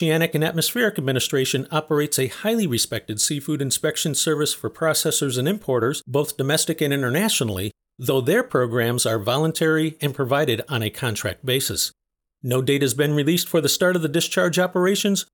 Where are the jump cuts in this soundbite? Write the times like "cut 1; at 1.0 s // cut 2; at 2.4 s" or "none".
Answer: none